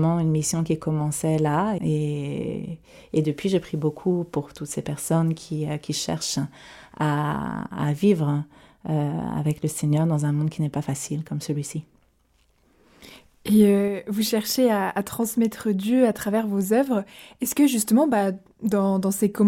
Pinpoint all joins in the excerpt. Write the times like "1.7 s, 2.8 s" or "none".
1.8 s